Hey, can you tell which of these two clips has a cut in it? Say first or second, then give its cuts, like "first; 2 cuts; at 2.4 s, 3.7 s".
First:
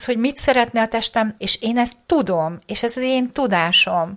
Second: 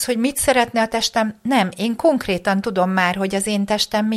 first; 1 cut; at 1.4 s